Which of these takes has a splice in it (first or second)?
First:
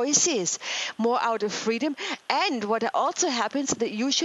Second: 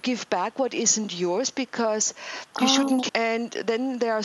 second